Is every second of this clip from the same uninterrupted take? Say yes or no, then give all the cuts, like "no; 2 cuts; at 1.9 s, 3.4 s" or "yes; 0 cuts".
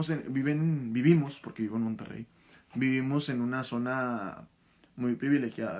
yes; 0 cuts